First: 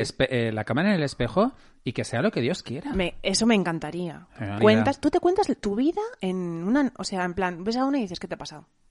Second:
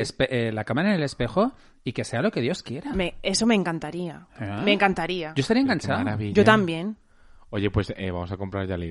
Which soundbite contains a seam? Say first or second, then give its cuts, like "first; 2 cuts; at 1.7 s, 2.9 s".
first; 1 cut; at 4.6 s